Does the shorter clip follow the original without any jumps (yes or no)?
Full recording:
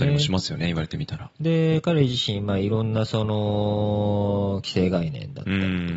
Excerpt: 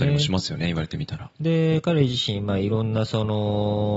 yes